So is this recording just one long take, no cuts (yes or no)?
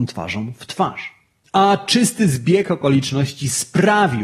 yes